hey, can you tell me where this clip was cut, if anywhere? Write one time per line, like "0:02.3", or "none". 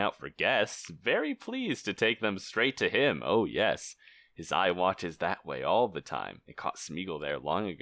none